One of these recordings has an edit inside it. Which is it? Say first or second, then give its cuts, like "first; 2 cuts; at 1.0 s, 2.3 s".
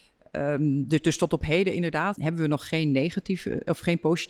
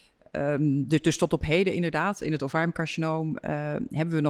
first; 1 cut; at 2.1 s